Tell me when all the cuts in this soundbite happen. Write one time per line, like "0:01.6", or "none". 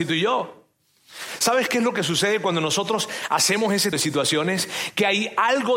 0:03.9